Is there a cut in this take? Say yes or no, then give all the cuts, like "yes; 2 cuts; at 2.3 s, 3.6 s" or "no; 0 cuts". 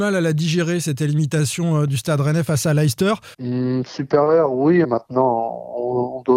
yes; 2 cuts; at 3.3 s, 4.8 s